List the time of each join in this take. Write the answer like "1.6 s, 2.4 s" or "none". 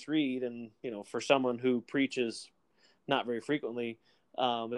none

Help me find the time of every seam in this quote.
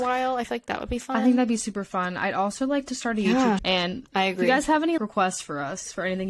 3.6 s, 5.0 s

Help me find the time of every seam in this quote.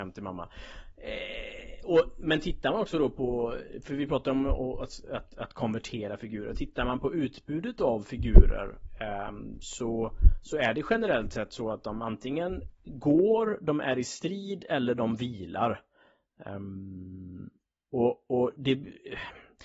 none

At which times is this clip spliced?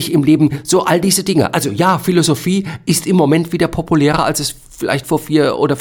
none

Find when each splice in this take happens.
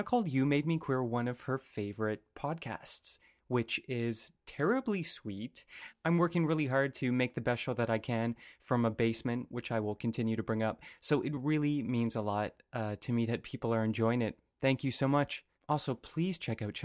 none

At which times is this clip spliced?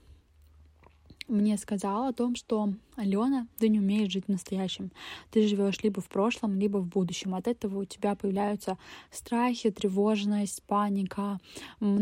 none

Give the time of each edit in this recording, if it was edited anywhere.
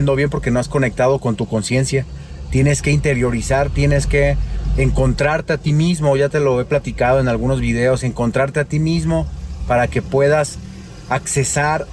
none

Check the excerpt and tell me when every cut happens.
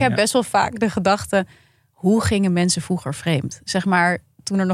none

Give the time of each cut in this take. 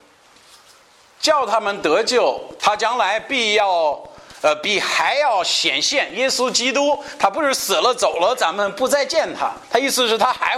2.6 s

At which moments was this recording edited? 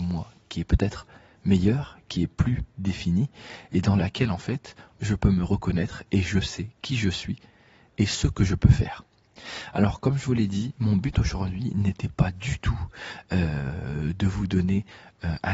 4.9 s

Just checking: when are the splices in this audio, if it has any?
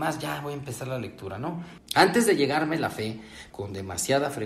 1.8 s, 3.5 s

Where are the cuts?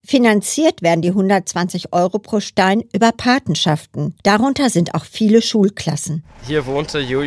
4.2 s

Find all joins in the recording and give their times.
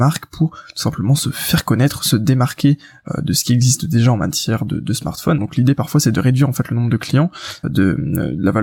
5.4 s, 7.6 s

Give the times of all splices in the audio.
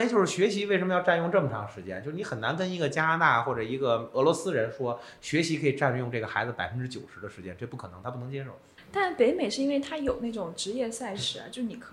none

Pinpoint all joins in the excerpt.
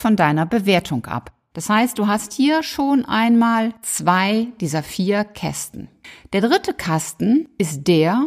none

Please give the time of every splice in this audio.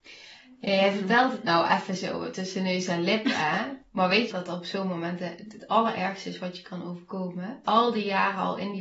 4.3 s, 7.6 s

